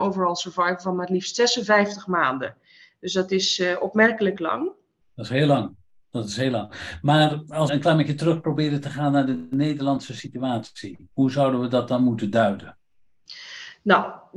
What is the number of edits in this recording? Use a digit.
2